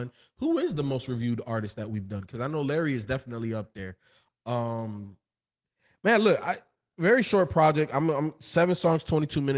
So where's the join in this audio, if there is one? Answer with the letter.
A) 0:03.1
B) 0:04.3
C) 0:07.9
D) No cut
B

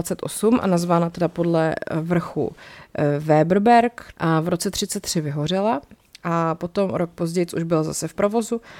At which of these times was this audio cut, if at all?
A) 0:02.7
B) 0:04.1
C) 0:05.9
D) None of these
B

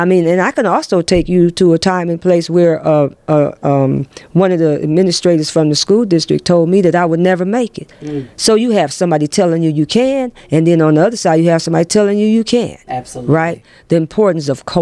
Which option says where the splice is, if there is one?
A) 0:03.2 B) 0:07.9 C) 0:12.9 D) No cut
C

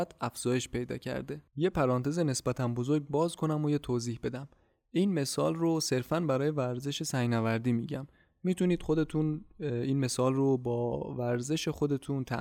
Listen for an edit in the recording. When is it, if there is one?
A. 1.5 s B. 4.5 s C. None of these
A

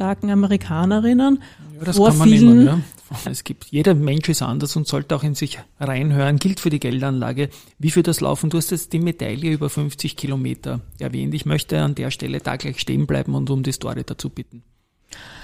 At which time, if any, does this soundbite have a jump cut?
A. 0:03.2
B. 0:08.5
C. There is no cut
A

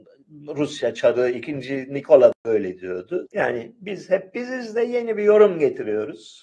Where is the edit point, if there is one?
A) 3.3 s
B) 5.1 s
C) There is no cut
A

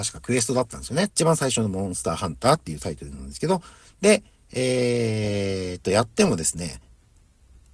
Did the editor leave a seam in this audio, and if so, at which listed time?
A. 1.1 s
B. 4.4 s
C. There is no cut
A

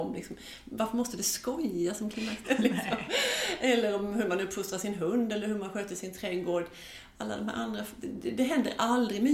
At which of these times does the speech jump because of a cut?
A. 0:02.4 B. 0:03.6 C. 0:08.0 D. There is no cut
A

